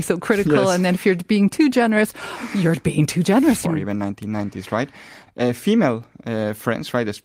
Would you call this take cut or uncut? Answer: cut